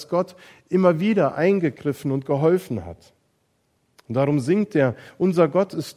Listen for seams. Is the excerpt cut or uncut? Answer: uncut